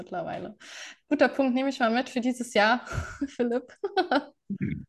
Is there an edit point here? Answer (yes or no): no